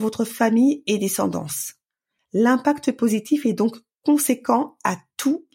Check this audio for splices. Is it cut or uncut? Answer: uncut